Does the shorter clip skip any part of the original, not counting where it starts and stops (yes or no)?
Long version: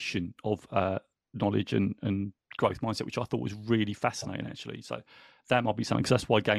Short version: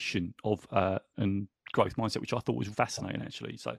yes